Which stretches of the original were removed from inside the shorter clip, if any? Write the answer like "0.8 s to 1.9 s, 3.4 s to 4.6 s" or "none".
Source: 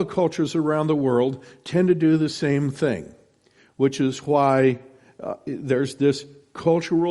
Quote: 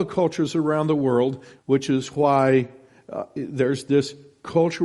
1.6 s to 3.7 s